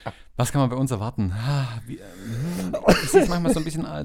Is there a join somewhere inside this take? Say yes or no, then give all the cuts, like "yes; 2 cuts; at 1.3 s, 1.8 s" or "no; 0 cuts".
no; 0 cuts